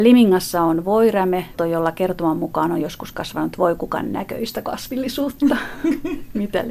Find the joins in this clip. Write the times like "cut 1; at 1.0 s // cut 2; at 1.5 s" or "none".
cut 1; at 1.6 s

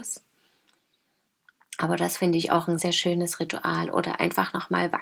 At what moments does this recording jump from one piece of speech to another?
cut 1; at 2.8 s

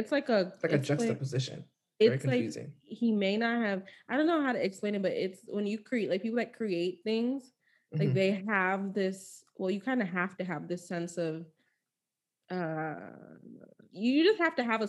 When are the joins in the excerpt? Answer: none

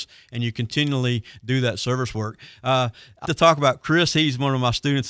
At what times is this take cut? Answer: cut 1; at 3.2 s

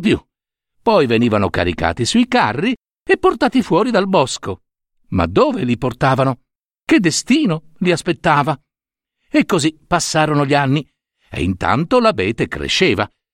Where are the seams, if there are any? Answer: none

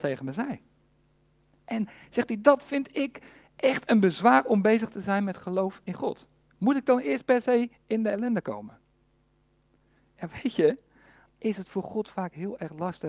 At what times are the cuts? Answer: cut 1; at 11.3 s

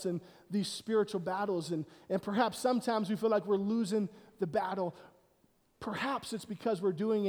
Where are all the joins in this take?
none

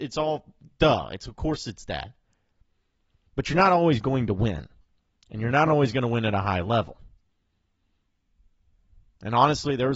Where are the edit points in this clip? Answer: none

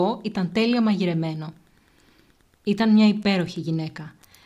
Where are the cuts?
cut 1; at 2.5 s

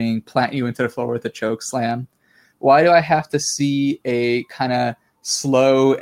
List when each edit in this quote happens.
cut 1; at 2.4 s

